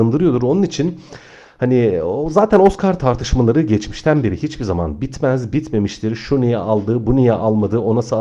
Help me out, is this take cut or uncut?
uncut